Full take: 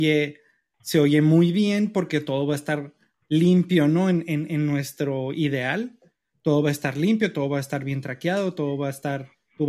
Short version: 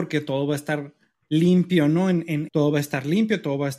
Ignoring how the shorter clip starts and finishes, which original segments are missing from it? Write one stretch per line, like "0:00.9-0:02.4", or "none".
0:04.5-0:06.4